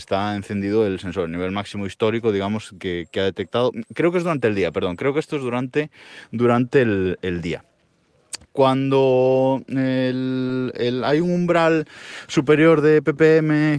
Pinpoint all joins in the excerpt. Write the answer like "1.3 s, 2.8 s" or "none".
8.4 s